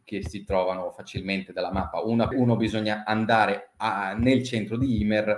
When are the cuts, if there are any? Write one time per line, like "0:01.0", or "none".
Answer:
0:02.3